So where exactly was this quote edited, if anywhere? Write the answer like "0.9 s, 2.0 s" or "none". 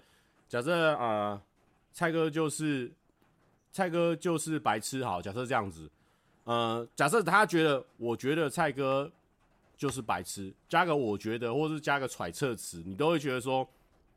none

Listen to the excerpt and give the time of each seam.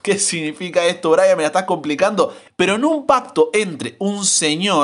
2.5 s

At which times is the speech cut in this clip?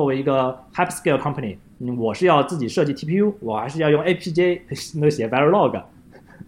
3.4 s

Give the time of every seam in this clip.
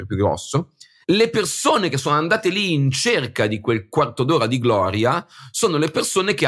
1.0 s

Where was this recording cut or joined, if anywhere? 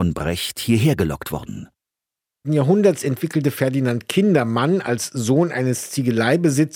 2.4 s

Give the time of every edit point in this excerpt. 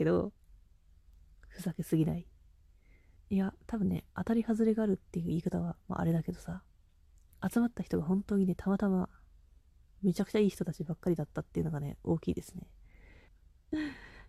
3.2 s, 13.3 s

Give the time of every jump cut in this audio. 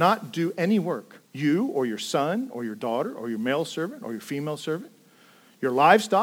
1.2 s

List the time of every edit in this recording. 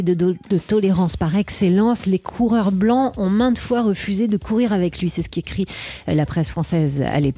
none

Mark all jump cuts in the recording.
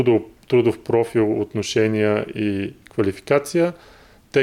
none

